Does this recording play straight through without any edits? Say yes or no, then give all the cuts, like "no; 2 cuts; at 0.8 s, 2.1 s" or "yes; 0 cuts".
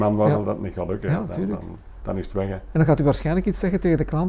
no; 1 cut; at 2.0 s